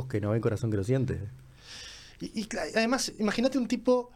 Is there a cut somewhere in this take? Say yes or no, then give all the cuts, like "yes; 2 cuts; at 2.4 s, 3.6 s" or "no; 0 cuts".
no; 0 cuts